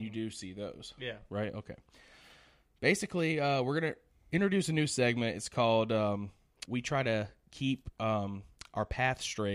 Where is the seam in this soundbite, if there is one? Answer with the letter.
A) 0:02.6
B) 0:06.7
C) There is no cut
B